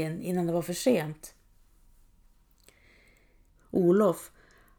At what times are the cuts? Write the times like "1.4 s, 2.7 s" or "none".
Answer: 3.5 s